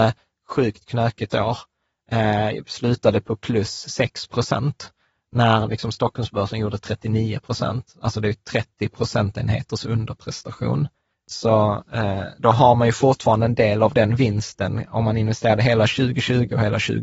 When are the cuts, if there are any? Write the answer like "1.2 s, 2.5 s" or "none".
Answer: 11.1 s, 12.4 s